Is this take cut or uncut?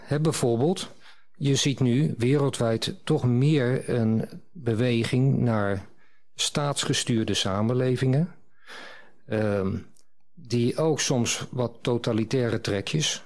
uncut